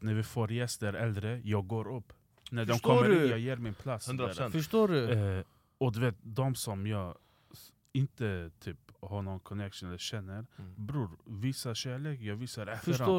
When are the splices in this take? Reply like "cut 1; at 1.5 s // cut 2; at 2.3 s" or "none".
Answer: none